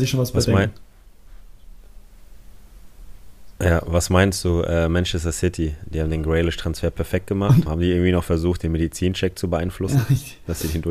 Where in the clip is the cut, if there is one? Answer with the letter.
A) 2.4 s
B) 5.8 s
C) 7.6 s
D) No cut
C